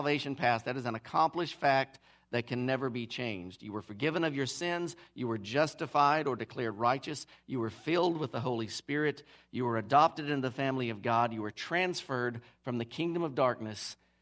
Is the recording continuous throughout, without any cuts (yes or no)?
yes